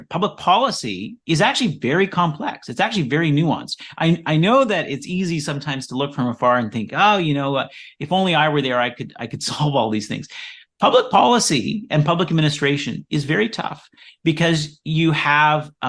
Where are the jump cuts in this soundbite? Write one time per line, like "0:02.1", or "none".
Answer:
none